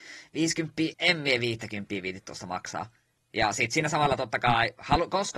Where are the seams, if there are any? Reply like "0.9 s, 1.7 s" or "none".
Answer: 0.9 s, 3.2 s